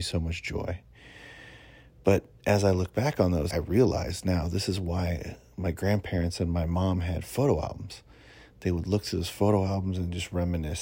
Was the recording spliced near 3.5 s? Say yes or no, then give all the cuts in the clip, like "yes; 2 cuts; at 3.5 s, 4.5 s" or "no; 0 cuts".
yes; 1 cut; at 3.5 s